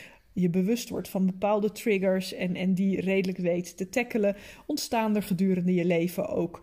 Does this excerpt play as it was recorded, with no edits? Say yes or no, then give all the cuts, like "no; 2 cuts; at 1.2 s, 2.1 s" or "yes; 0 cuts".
yes; 0 cuts